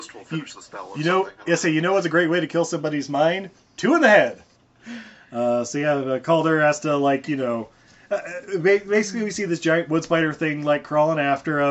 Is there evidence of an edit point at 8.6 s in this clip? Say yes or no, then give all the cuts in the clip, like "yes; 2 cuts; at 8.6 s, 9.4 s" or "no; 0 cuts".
no; 1 cut; at 4.5 s